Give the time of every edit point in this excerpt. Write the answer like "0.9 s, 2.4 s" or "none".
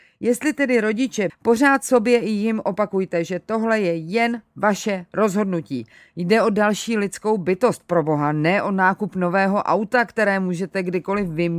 1.3 s

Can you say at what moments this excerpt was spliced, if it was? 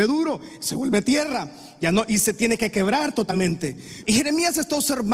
4.0 s

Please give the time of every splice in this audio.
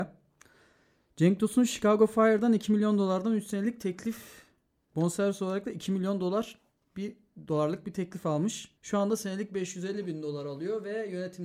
8.8 s

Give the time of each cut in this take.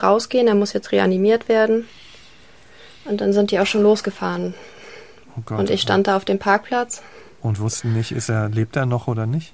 none

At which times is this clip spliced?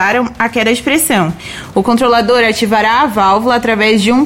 1.7 s

